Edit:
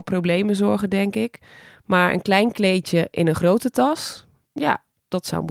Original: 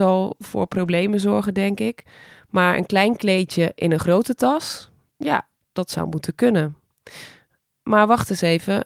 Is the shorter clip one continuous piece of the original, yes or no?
yes